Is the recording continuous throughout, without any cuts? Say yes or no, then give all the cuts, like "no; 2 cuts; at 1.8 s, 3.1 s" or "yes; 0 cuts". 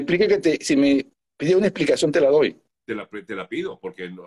yes; 0 cuts